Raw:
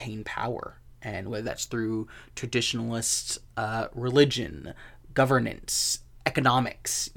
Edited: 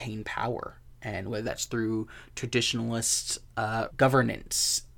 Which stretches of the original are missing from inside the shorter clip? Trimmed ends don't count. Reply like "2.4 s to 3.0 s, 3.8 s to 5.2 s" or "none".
3.9 s to 5.1 s